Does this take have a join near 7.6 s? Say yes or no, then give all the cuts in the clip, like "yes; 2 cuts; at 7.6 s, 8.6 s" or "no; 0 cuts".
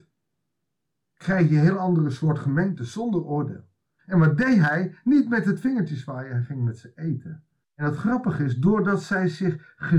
yes; 2 cuts; at 4.0 s, 7.6 s